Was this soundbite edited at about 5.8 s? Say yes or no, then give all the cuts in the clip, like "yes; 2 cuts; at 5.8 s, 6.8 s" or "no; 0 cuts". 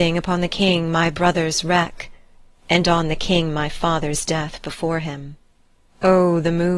yes; 1 cut; at 5.8 s